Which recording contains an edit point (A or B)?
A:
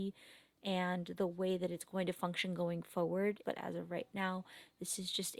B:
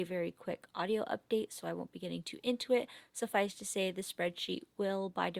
A